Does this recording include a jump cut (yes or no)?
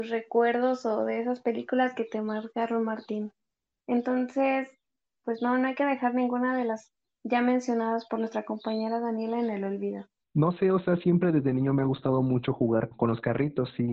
yes